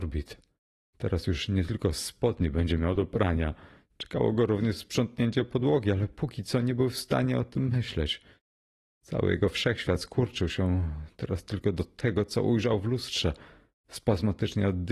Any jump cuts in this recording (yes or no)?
no